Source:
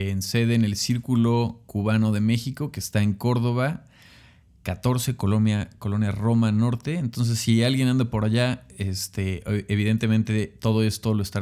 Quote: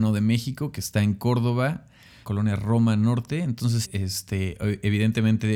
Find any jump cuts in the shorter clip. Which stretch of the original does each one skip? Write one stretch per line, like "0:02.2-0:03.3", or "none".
0:04.2-0:05.8
0:07.4-0:08.7